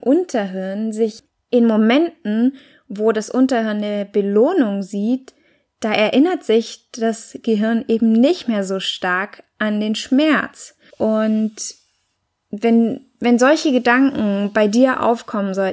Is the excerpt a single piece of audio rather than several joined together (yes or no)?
no